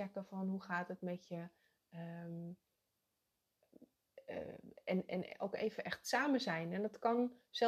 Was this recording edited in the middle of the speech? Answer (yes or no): no